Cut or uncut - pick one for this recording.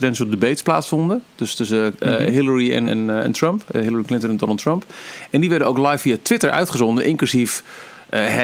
cut